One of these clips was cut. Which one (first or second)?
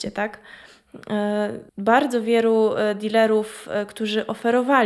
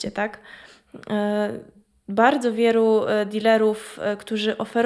first